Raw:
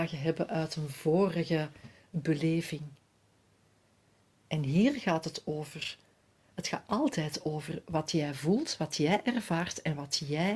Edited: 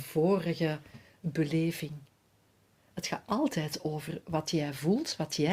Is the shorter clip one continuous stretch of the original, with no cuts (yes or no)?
no